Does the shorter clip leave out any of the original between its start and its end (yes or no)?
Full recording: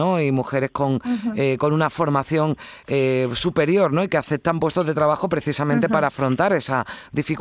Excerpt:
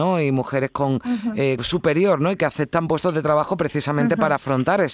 yes